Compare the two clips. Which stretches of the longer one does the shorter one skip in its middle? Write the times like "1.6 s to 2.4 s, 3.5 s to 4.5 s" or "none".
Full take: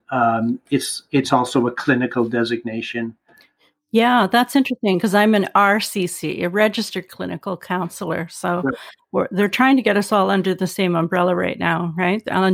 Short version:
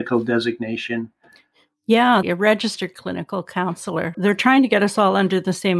4.3 s to 6.4 s, 8.3 s to 9.3 s